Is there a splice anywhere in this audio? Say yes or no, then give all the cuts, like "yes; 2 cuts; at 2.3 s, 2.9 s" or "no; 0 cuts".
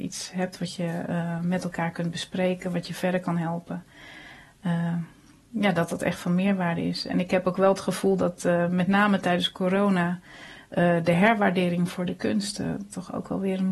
no; 0 cuts